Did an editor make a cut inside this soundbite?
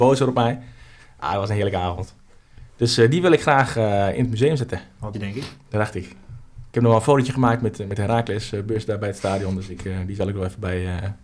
yes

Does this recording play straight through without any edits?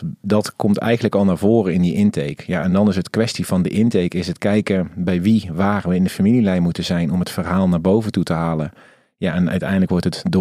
yes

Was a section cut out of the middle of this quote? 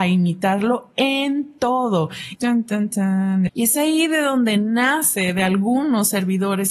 yes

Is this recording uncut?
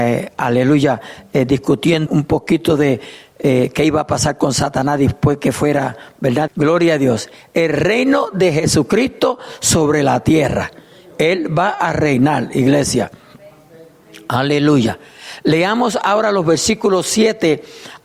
no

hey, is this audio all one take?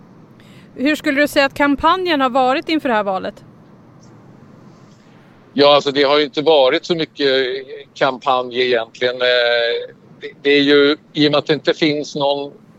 yes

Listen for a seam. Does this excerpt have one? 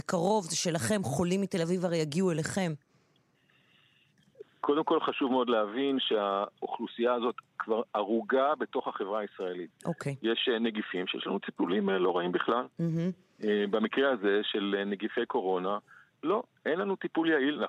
yes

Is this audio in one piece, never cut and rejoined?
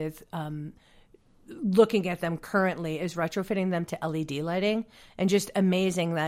yes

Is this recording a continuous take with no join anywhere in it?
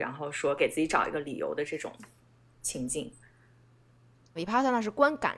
no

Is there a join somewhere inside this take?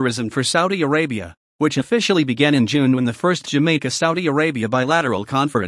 yes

